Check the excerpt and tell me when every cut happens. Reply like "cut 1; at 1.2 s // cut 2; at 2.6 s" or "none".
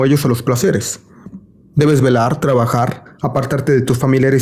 none